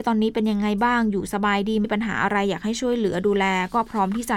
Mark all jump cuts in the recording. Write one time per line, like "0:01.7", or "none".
0:01.8